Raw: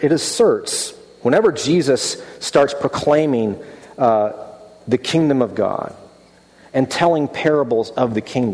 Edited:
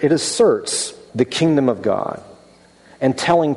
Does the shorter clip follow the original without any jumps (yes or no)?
no